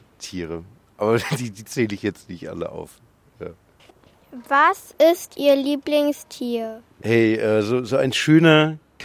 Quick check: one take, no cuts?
yes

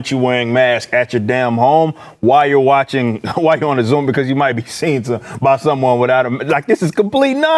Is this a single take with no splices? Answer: yes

